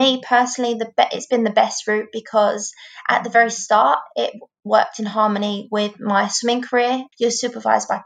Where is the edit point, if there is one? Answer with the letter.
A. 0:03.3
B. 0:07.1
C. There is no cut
B